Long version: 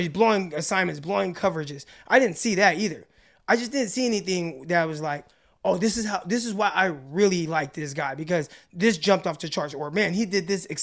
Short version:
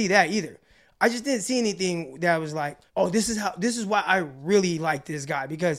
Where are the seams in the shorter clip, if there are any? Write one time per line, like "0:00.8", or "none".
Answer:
0:02.9